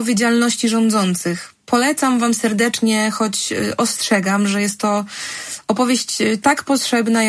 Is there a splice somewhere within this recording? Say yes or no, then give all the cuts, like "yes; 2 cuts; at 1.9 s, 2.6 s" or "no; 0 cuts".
no; 0 cuts